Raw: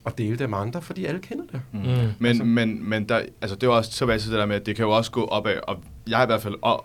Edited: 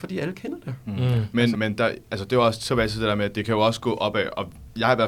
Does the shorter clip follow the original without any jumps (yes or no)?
no